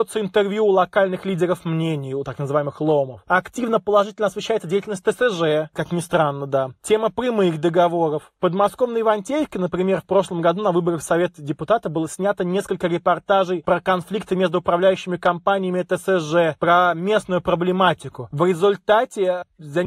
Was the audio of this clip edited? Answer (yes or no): no